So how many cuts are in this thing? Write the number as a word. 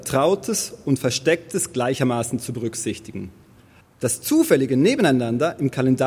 one